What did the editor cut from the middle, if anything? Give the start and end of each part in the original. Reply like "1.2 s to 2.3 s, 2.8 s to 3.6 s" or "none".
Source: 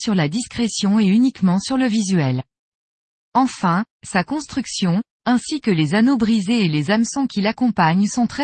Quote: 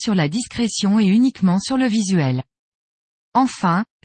none